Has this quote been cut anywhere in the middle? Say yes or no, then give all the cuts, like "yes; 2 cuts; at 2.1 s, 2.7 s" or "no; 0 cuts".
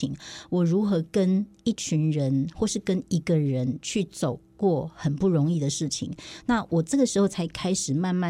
no; 0 cuts